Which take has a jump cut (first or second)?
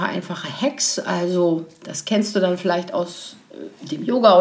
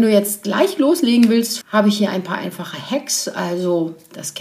second